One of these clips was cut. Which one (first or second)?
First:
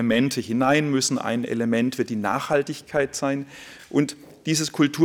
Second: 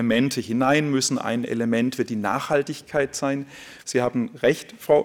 second